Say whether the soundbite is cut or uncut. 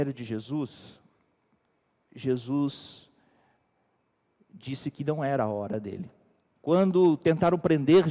cut